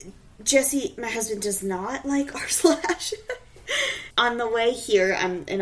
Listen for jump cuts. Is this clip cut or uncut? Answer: cut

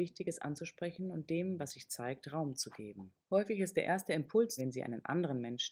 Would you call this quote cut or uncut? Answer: cut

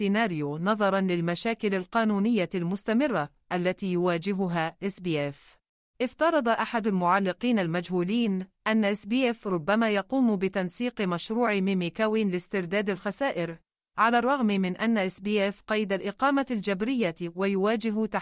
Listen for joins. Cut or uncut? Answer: cut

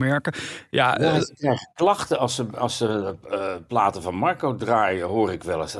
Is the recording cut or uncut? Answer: uncut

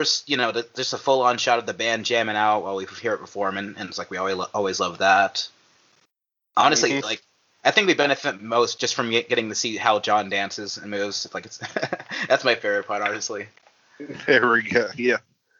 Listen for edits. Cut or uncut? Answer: uncut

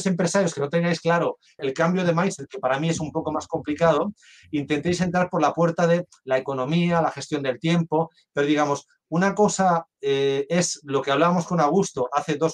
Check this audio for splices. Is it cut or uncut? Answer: cut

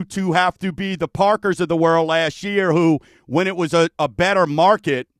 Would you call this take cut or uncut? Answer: uncut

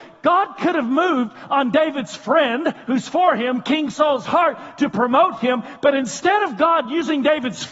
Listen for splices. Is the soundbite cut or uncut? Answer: uncut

